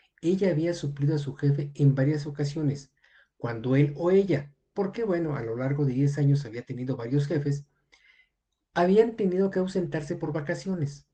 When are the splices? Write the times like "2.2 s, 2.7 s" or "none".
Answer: none